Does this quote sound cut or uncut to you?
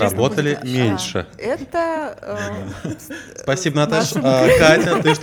uncut